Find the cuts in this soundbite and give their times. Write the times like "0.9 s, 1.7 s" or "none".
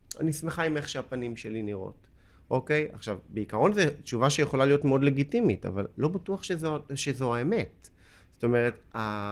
none